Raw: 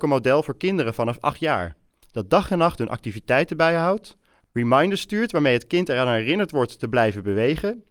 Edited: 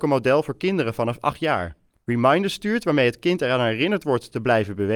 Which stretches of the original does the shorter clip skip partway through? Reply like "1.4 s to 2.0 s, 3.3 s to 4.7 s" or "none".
1.9 s to 4.4 s